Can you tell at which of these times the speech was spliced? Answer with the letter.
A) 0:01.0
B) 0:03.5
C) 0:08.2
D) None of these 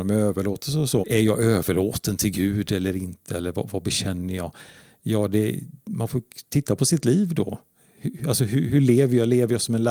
A